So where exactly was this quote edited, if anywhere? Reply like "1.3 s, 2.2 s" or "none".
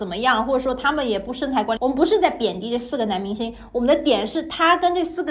1.8 s